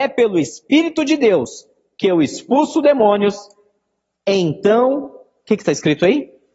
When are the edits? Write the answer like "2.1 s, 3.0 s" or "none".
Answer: none